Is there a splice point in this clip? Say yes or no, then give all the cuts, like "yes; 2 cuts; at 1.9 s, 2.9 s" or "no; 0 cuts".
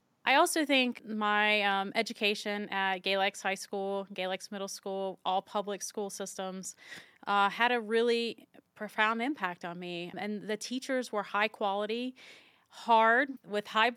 no; 0 cuts